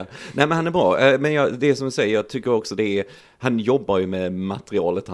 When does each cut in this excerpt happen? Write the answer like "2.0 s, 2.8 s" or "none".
none